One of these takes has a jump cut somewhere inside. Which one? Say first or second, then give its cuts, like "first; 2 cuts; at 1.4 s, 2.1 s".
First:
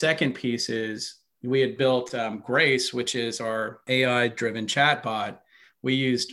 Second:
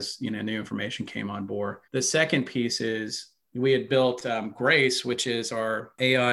second; 1 cut; at 1.8 s